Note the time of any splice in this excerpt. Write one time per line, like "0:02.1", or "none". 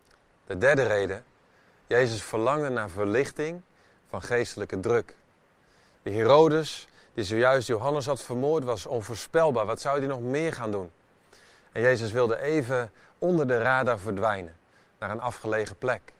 none